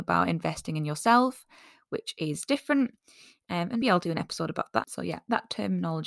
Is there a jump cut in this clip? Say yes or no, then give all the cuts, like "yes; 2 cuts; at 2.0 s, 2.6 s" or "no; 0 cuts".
yes; 2 cuts; at 3.8 s, 4.8 s